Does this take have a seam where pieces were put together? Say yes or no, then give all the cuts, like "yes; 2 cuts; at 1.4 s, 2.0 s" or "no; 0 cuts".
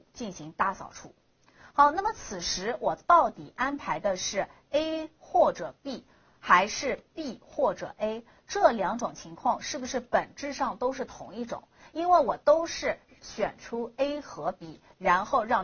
no; 0 cuts